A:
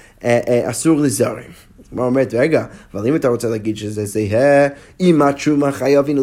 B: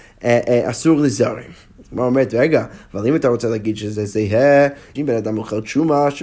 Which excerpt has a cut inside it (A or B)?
B